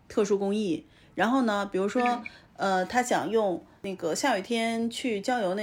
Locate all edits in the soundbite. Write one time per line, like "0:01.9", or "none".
none